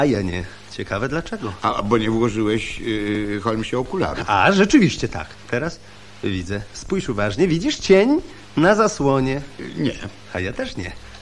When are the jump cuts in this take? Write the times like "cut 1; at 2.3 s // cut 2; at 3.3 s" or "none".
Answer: none

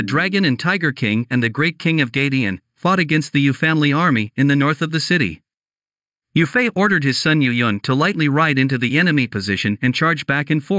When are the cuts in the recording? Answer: none

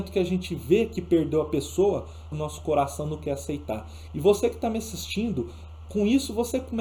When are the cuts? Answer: cut 1; at 2.3 s // cut 2; at 4.1 s

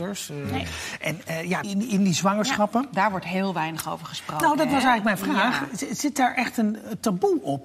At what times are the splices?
cut 1; at 1.6 s

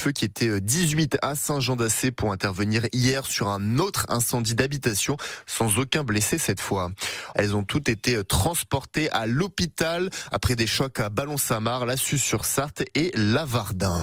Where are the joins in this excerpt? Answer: cut 1; at 7.3 s

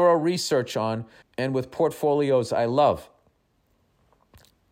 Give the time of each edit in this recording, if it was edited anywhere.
cut 1; at 1.2 s

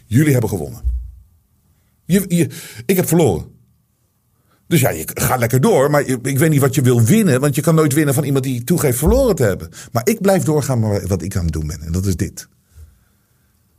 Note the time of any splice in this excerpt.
none

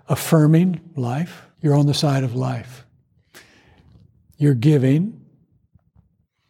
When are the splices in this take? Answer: cut 1; at 1.5 s

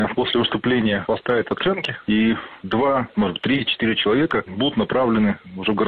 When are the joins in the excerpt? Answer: none

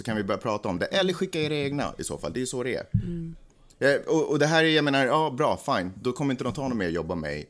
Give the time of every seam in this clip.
none

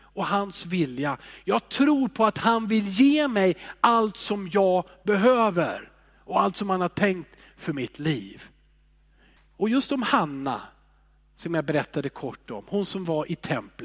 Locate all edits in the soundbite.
cut 1; at 9.4 s

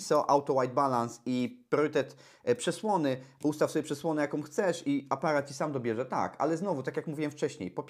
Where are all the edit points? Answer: none

